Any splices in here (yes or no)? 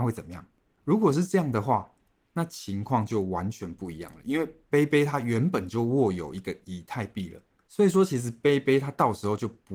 no